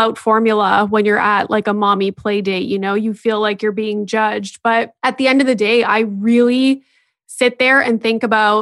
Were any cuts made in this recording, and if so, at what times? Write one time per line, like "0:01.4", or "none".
none